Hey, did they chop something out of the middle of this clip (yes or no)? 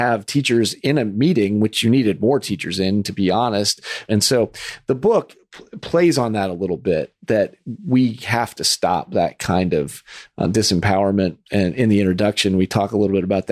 yes